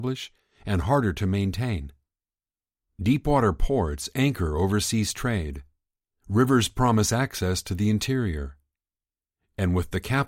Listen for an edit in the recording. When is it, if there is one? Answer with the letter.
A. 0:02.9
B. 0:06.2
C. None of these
C